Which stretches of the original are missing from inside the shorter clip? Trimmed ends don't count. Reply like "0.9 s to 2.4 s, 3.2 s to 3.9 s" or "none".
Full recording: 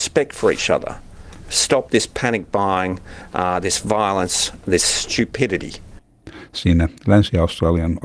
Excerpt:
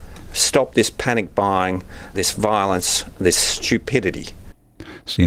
3.3 s to 3.6 s